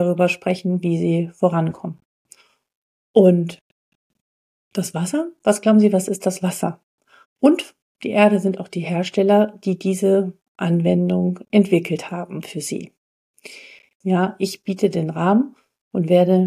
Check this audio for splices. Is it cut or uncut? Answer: cut